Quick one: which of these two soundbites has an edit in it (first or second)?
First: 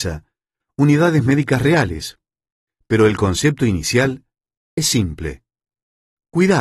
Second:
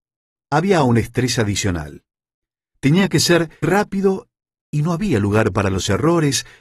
second